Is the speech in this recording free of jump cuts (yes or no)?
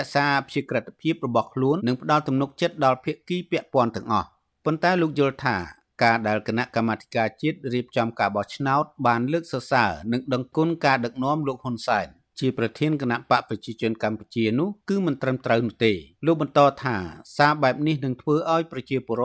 no